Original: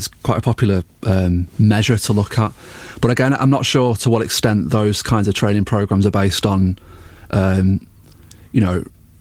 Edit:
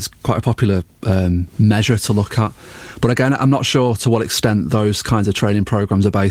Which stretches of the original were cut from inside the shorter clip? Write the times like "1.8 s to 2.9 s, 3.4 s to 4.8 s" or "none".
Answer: none